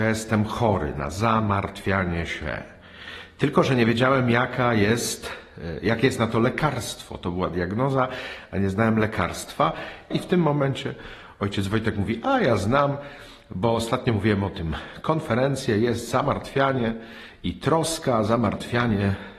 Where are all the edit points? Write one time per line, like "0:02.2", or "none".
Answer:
0:10.1